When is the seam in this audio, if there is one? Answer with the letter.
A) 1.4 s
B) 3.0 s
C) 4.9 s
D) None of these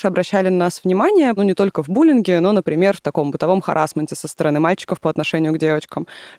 A